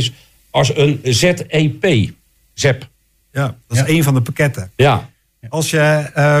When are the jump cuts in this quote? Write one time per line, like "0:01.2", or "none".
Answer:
0:01.0